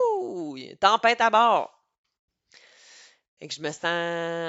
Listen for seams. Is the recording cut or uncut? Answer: uncut